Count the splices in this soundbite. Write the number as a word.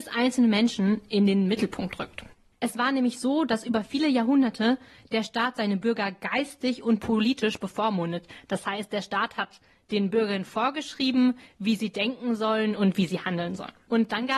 zero